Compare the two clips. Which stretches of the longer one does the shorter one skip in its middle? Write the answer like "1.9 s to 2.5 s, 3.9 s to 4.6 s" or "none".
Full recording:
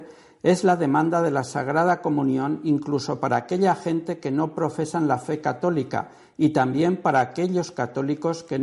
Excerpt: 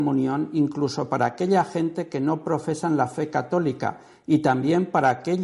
none